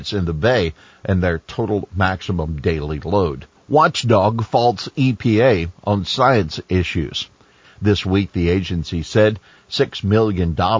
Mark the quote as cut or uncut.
cut